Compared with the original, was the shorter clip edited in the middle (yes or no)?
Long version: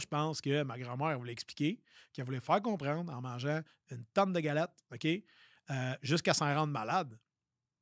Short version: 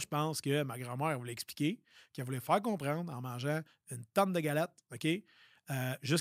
no